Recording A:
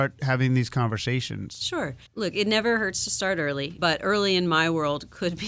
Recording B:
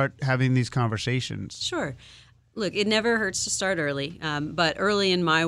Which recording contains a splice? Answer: A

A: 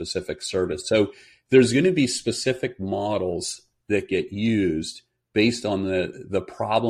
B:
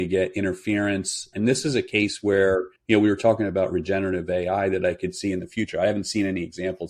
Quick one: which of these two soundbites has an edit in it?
B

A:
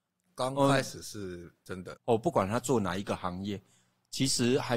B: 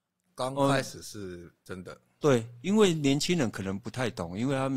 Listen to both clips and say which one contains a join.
A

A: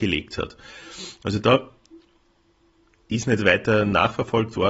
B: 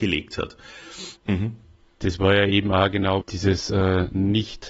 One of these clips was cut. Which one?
B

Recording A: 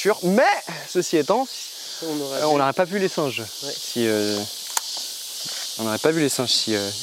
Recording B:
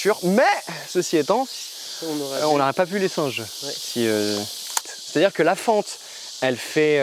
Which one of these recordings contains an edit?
B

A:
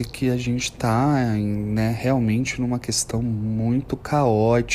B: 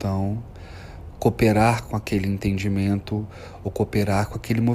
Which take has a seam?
B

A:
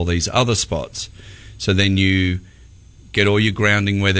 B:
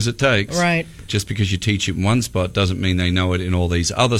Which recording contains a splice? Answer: B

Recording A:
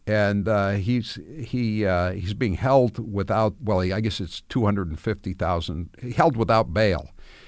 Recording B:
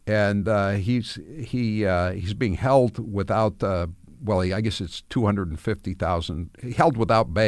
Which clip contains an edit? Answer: A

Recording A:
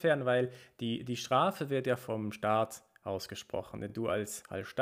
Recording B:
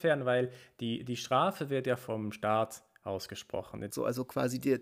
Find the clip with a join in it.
B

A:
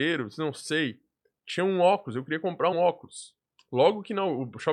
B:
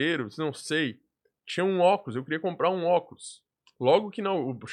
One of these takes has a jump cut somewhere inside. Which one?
A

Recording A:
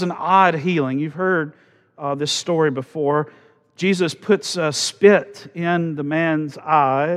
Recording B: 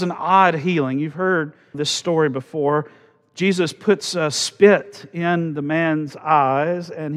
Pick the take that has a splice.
B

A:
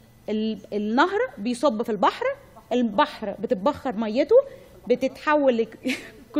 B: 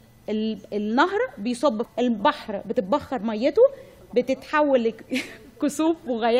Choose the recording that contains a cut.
B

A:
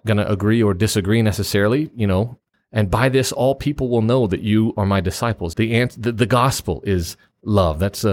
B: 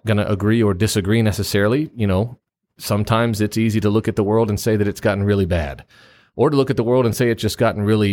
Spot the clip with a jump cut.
A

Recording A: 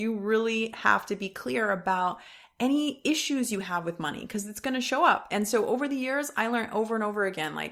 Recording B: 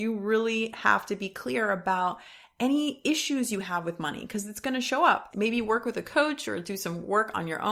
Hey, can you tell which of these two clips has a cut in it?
B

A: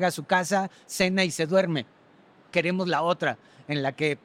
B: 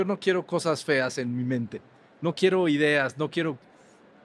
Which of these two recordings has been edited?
A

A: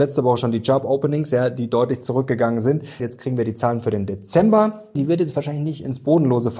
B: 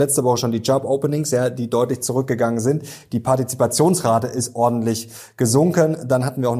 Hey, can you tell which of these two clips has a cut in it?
A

